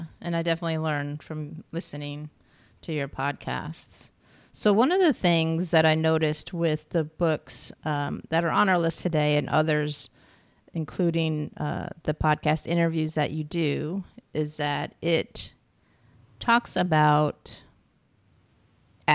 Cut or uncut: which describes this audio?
uncut